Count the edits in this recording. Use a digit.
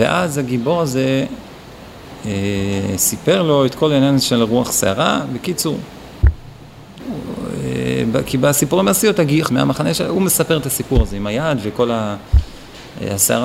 2